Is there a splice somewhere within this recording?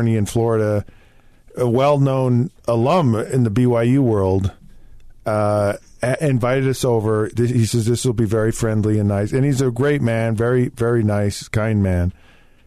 no; 0 cuts

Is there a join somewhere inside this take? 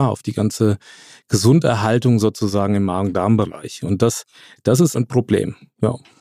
yes; 1 cut; at 4.9 s

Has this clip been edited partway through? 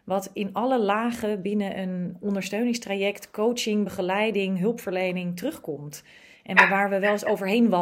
no; 0 cuts

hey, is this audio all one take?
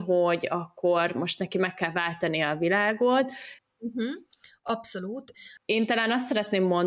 no; 2 cuts; at 3.6 s, 5.6 s

